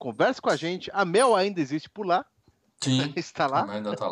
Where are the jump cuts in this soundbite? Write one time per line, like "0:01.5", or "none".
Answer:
none

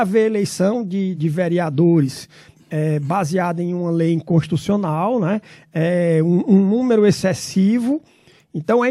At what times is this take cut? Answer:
0:01.1

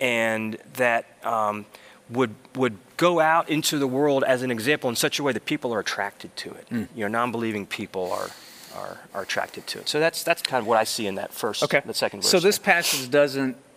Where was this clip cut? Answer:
none

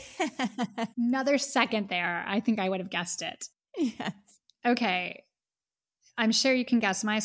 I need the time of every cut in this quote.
0:00.9

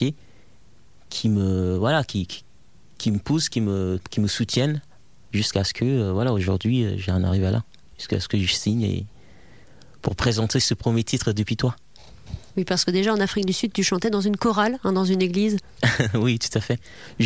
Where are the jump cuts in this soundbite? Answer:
none

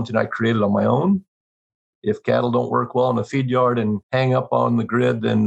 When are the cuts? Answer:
0:01.9
0:04.0

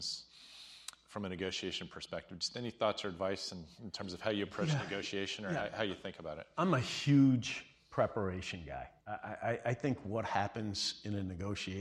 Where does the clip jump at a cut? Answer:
0:09.0

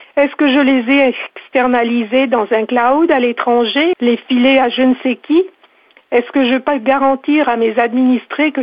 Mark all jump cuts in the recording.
0:03.9

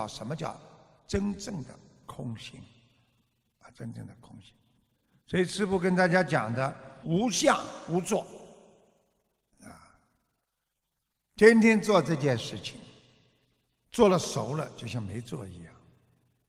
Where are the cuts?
0:07.0

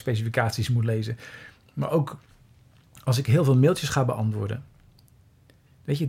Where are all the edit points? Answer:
none

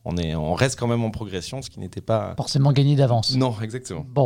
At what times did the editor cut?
none

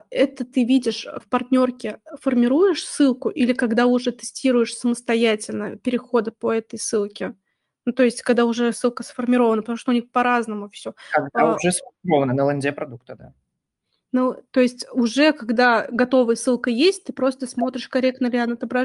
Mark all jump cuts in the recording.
0:01.2

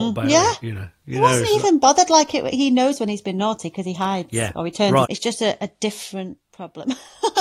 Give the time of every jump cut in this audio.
0:05.0

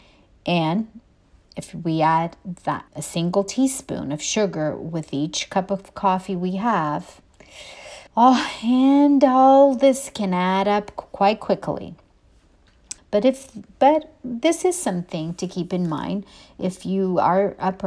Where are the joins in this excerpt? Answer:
0:02.9
0:08.1
0:13.0

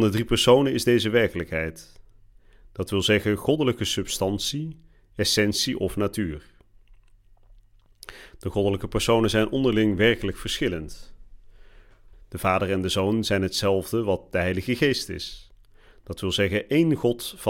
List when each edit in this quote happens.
0:12.1

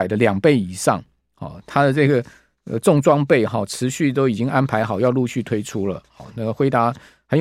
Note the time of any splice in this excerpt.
none

